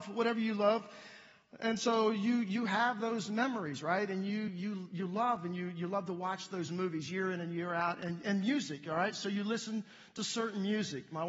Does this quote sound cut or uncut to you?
uncut